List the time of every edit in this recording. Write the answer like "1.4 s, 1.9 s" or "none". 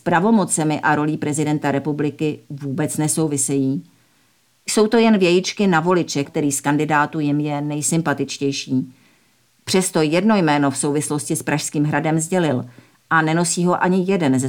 6.2 s, 9.5 s

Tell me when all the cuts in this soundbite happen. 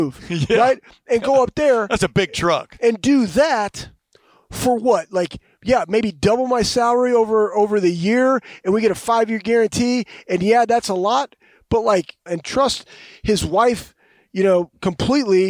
12.3 s

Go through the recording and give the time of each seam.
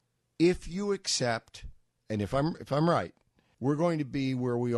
3.5 s

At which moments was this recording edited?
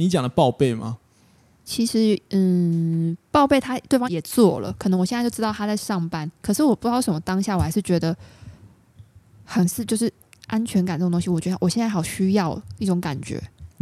4.0 s

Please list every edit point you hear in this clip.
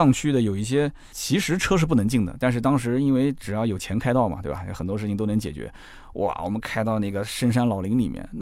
none

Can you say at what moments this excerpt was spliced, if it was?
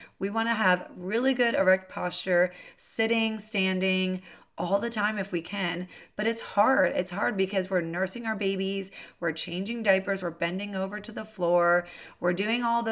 none

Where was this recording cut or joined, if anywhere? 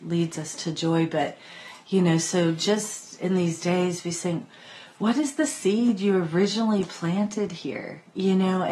none

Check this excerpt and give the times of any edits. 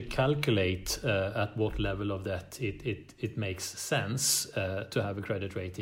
none

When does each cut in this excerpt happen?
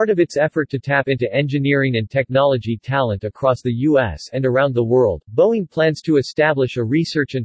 none

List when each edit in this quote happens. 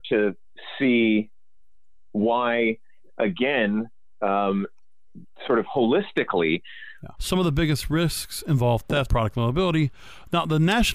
7.2 s, 9.1 s

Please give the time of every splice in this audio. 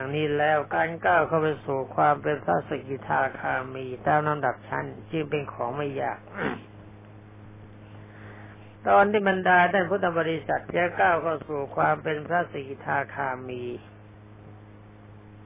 8.8 s

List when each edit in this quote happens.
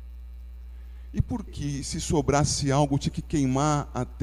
1.5 s

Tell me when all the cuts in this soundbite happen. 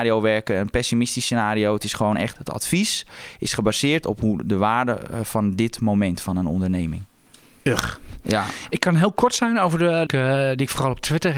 10.1 s

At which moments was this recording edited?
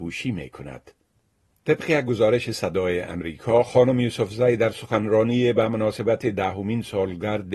none

